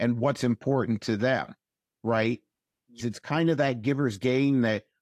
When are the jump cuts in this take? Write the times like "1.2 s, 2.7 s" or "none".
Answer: 3.0 s